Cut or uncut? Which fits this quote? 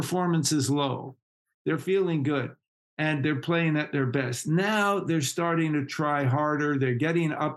cut